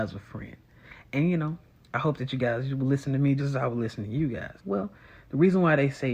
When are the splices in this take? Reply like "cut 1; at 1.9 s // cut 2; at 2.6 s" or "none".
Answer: cut 1; at 3.4 s // cut 2; at 4.6 s